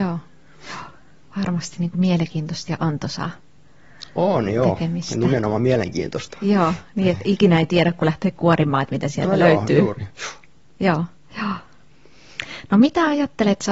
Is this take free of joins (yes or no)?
yes